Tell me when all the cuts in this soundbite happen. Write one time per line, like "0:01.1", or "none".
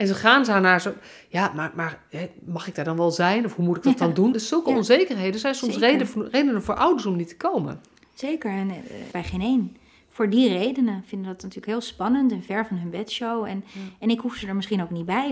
0:04.3
0:09.1

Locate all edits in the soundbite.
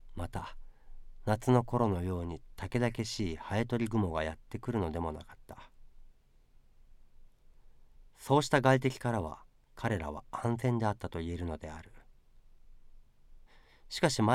0:08.1

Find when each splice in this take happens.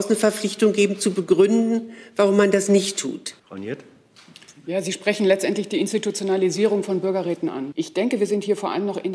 0:03.4
0:07.7

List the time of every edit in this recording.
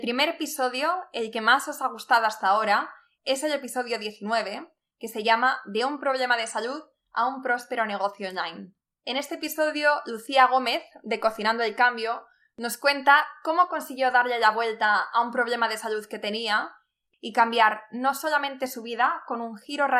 none

